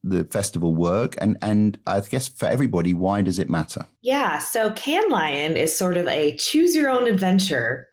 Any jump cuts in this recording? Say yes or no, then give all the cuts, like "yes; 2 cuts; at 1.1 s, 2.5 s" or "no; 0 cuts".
no; 0 cuts